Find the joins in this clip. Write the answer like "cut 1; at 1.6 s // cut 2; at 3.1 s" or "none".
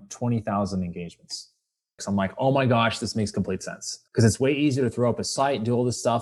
cut 1; at 2.0 s // cut 2; at 4.1 s